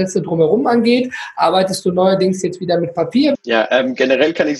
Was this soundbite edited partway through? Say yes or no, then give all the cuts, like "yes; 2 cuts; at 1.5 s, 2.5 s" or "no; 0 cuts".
yes; 1 cut; at 3.3 s